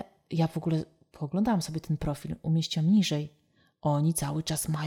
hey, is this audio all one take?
yes; 0 cuts

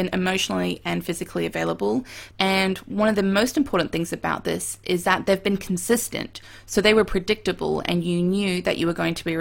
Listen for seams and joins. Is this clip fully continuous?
no; 1 cut; at 2.3 s

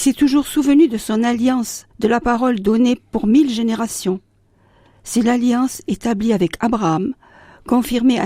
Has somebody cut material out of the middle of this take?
yes; 1 cut; at 1.9 s

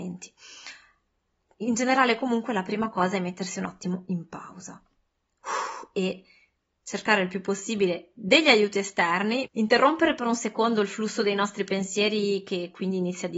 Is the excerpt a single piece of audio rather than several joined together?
no; 1 cut; at 9.5 s

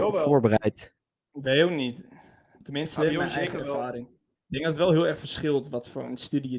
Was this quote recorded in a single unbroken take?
yes; 0 cuts

